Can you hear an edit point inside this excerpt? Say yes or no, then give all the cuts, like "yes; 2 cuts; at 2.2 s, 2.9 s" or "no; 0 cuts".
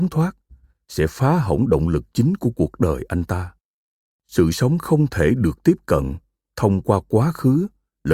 no; 0 cuts